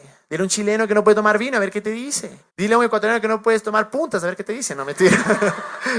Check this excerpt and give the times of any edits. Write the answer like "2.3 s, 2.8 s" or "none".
2.5 s